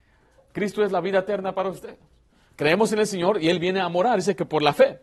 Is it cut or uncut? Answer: cut